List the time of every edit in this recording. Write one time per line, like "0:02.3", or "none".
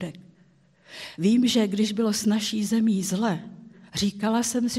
none